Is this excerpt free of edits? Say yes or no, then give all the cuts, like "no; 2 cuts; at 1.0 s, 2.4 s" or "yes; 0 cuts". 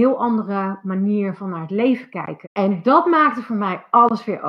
no; 1 cut; at 2.4 s